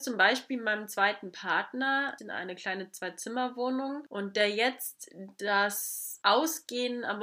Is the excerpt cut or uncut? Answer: cut